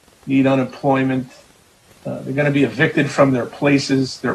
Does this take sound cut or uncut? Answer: uncut